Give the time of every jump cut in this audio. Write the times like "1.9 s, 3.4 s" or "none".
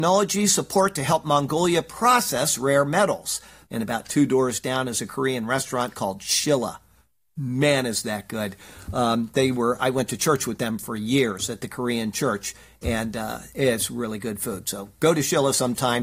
3.6 s